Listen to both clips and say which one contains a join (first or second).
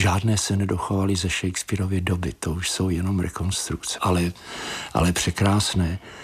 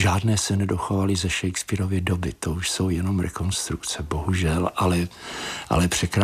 first